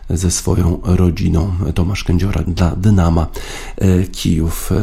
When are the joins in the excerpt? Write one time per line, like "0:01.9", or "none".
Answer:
0:02.4